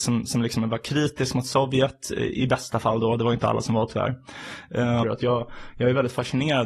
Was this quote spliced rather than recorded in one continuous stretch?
yes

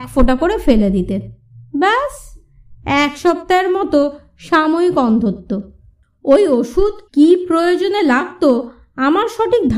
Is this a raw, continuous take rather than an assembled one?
no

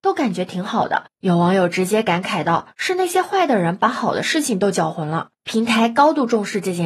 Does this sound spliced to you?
yes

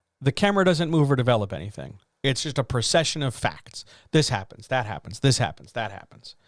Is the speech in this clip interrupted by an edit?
no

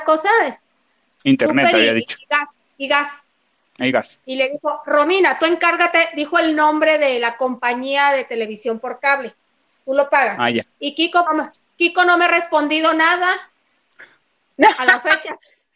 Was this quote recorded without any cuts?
no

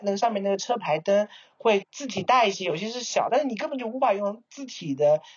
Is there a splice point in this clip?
yes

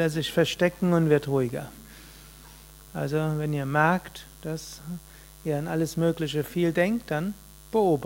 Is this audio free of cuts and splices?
yes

